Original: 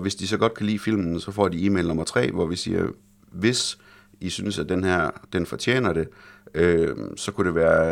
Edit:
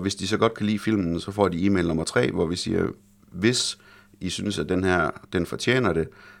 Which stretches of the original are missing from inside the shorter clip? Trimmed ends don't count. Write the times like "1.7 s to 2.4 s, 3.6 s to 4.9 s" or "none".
none